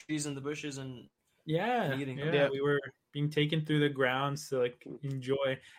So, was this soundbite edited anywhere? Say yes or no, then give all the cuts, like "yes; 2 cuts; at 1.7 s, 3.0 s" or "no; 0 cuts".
no; 0 cuts